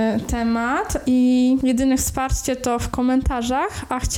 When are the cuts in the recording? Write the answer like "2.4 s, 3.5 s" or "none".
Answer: 1.0 s